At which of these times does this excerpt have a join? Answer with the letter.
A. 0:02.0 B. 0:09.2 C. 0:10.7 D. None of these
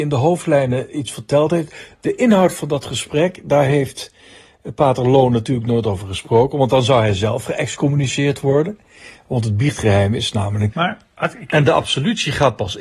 C